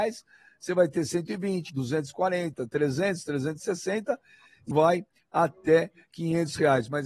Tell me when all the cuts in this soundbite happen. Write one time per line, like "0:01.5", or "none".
0:01.7
0:04.7